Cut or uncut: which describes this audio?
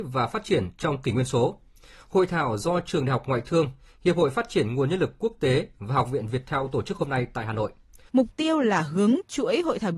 cut